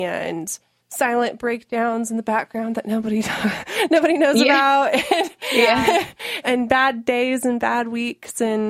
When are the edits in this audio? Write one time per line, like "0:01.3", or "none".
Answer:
0:06.4